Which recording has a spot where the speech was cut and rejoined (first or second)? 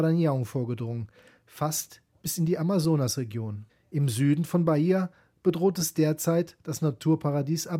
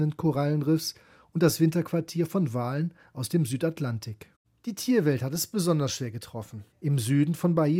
second